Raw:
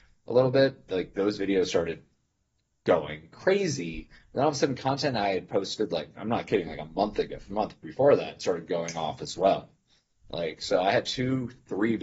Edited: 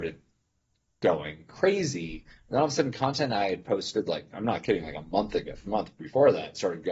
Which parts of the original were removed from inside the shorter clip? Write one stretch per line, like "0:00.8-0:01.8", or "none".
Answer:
none